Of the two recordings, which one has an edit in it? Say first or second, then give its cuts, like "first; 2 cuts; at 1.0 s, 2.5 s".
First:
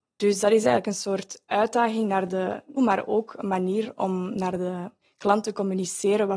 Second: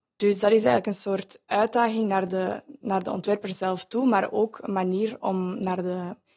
first; 1 cut; at 2.8 s